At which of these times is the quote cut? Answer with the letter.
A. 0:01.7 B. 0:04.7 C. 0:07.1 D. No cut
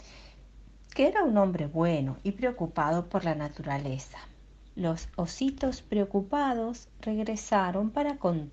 B